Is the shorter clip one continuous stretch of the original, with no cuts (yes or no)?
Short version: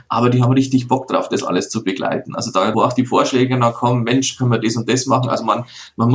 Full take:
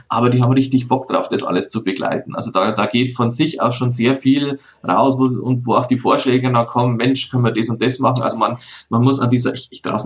no